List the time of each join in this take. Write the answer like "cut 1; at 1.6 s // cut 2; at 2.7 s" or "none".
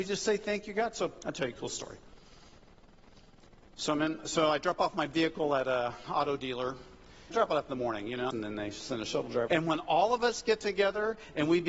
cut 1; at 7.3 s // cut 2; at 8.3 s // cut 3; at 9.5 s